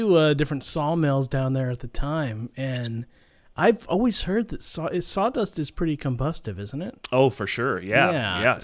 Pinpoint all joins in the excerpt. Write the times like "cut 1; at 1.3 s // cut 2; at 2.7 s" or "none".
none